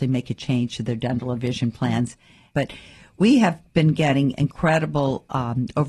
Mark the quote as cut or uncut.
cut